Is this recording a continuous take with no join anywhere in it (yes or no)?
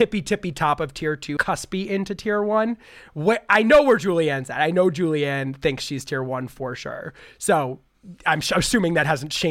no